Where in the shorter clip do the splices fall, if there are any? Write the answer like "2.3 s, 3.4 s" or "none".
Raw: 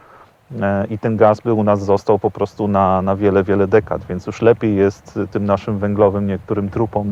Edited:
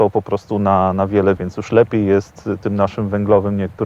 1.4 s